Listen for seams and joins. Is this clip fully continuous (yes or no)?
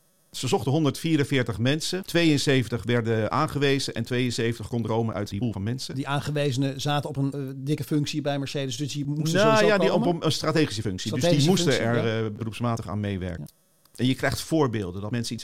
no